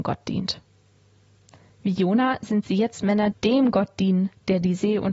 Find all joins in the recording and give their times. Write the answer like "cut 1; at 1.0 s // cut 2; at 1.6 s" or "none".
cut 1; at 3.3 s